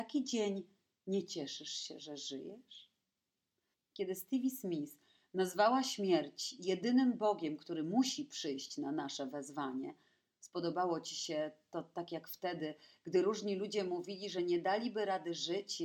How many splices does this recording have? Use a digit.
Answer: 1